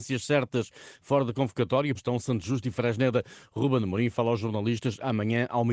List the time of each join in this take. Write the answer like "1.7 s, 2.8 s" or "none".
1.9 s